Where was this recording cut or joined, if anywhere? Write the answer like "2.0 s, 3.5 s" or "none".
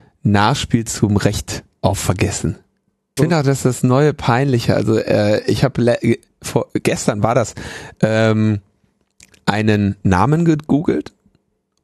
3.2 s